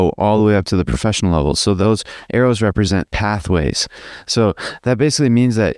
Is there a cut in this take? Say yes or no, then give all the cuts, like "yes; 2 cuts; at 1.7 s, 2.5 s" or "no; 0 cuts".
no; 0 cuts